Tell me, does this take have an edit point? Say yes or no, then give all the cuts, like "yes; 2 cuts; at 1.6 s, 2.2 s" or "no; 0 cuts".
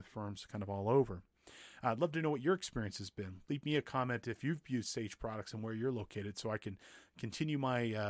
no; 0 cuts